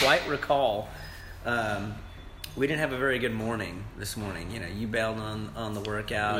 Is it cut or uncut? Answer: uncut